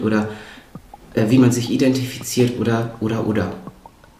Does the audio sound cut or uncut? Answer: uncut